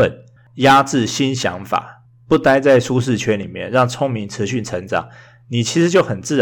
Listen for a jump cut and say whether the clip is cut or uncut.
uncut